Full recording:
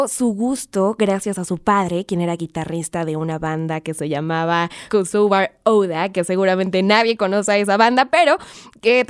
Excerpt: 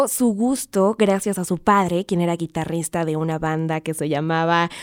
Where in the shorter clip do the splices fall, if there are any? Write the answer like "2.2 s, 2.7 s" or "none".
none